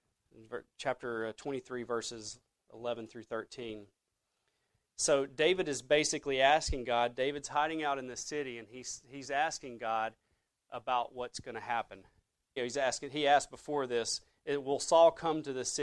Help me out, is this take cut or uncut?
cut